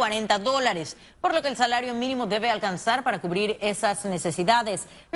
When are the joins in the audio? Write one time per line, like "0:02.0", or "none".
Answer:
none